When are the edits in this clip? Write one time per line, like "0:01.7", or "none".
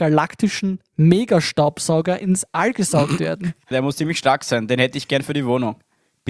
0:03.7